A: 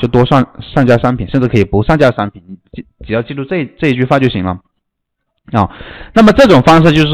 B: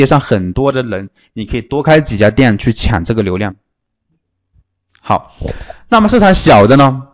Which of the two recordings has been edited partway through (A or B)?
A